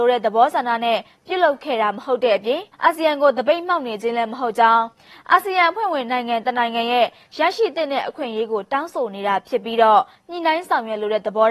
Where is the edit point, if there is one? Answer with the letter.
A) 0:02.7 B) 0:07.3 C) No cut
A